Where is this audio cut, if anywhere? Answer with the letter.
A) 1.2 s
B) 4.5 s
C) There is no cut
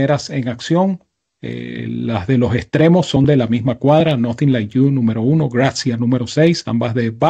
C